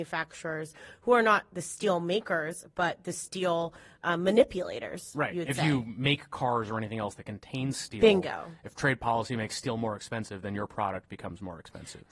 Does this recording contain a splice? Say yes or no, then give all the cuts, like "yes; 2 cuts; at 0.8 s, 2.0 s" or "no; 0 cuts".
no; 0 cuts